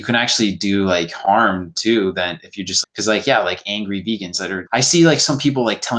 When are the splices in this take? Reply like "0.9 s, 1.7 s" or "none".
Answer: 2.8 s, 4.7 s